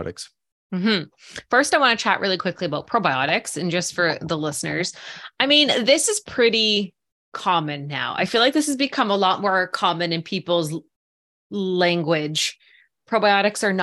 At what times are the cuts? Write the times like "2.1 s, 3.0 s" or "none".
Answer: none